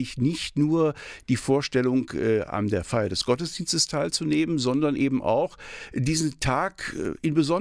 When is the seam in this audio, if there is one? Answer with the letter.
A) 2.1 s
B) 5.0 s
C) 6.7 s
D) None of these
D